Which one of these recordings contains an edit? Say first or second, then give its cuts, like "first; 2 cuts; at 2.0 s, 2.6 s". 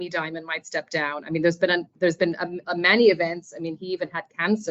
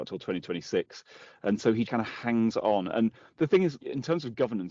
second; 2 cuts; at 1.9 s, 3.8 s